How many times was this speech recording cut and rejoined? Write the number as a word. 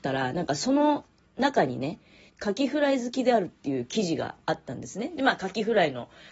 one